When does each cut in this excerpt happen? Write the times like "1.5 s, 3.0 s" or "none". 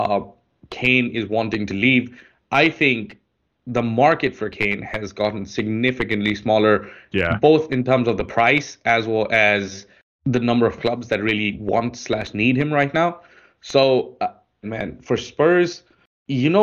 14.6 s